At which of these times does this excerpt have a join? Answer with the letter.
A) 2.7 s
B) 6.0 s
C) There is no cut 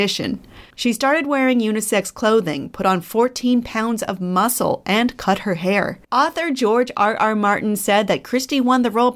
B